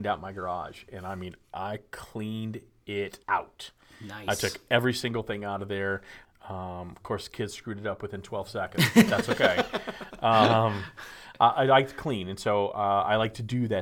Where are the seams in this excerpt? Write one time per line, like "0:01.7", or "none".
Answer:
0:03.2
0:06.2